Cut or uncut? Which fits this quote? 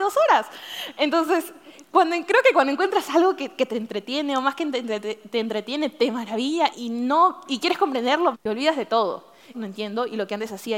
cut